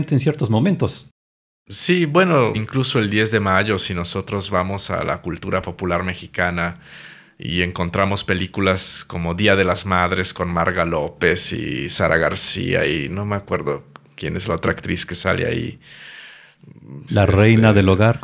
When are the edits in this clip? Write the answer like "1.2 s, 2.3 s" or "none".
2.5 s, 17.1 s